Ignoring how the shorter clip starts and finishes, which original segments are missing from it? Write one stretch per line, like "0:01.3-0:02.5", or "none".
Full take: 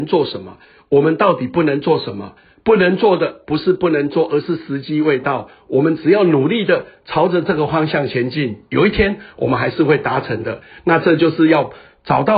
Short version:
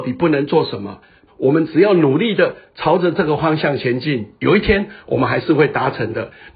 0:02.6-0:05.6